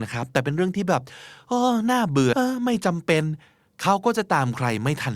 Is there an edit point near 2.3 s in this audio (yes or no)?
yes